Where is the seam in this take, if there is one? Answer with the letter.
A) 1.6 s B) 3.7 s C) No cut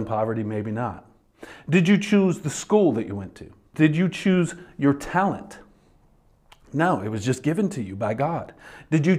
B